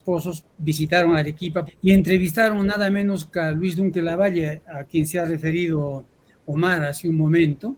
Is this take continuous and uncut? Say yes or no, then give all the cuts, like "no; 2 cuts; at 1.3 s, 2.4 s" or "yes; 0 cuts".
no; 1 cut; at 1.7 s